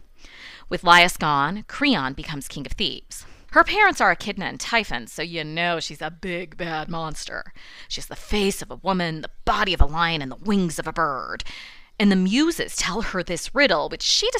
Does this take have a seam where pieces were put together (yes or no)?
yes